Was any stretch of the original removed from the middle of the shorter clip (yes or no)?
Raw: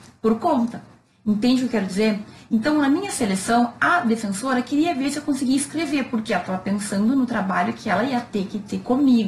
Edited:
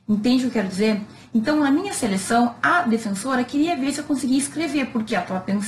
no